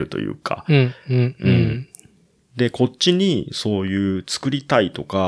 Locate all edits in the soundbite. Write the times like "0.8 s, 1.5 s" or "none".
none